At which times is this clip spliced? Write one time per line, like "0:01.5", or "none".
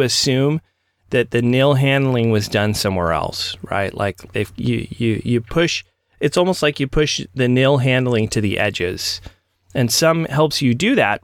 0:04.3